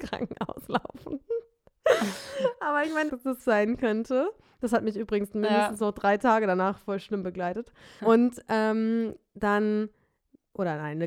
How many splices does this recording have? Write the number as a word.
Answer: two